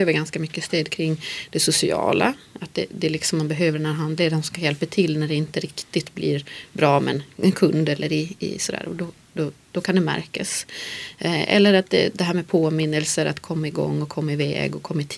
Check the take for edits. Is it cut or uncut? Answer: uncut